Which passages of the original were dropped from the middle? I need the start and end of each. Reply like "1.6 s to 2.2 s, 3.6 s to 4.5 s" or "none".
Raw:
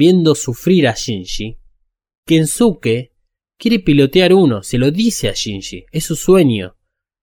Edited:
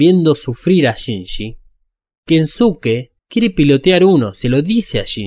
3.2 s to 3.5 s